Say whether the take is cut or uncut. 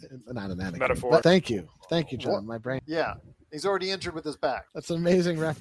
cut